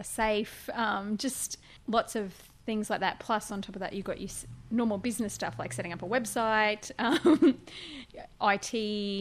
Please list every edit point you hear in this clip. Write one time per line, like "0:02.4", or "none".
none

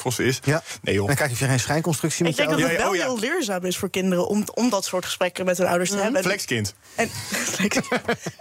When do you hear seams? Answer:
none

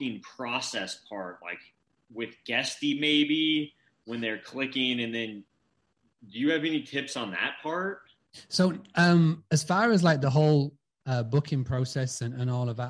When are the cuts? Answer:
none

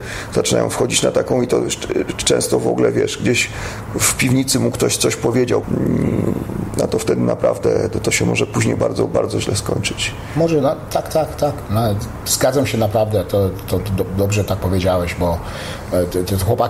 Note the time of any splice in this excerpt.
0:05.6

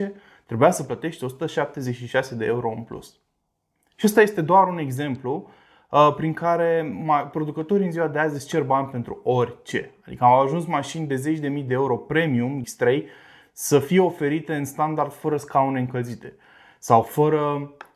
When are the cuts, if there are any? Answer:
0:12.6

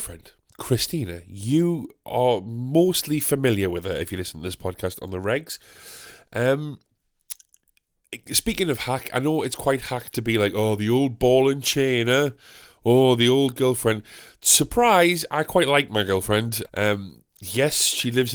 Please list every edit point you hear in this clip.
0:16.7

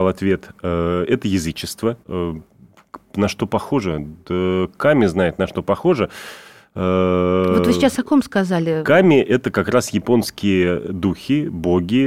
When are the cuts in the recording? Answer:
0:02.0

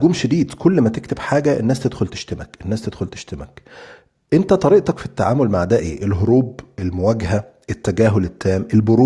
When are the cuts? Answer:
none

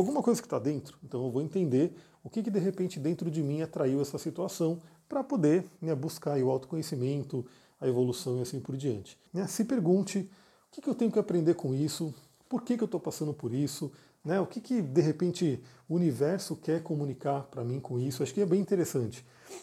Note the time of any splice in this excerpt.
0:09.3

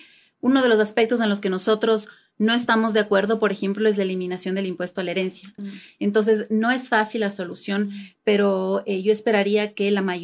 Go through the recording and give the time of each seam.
0:05.6

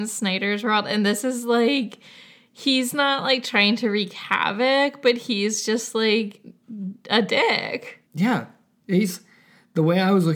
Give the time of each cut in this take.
0:08.1

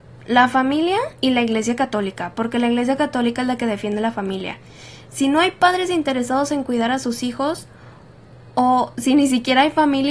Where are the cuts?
0:01.2

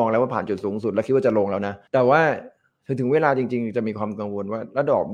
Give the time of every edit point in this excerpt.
0:01.9

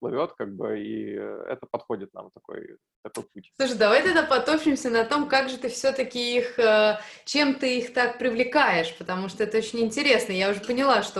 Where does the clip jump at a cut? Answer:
none

